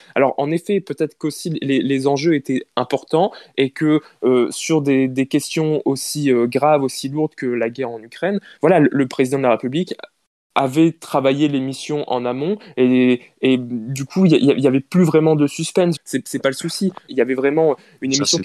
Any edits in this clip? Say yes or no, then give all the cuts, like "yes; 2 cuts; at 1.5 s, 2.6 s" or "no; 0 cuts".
yes; 3 cuts; at 8.6 s, 16.0 s, 17.1 s